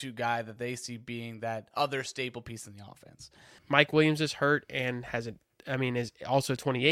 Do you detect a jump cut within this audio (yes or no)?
yes